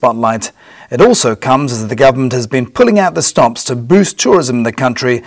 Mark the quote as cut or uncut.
uncut